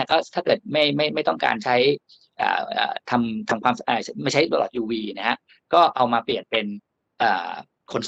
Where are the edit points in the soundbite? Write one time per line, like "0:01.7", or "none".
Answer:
none